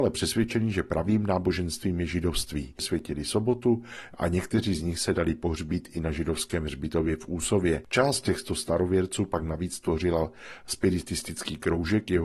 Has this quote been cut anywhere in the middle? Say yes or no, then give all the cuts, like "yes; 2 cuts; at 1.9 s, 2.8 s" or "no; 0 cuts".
no; 0 cuts